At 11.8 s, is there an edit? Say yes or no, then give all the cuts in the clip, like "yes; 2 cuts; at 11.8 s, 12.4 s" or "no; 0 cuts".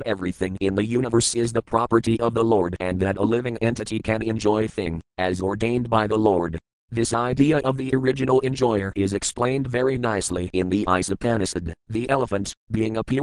yes; 2 cuts; at 6.7 s, 11.8 s